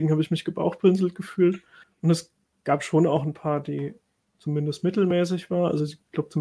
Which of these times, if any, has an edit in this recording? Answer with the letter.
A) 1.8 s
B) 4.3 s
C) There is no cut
A